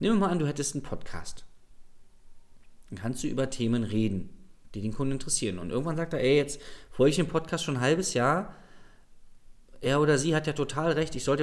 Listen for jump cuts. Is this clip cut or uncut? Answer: uncut